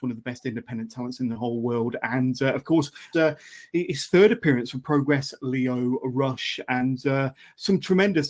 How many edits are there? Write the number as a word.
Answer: one